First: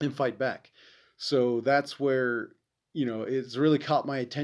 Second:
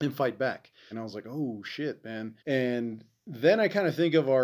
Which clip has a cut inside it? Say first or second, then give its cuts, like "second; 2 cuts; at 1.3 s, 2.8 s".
second; 2 cuts; at 0.9 s, 2.4 s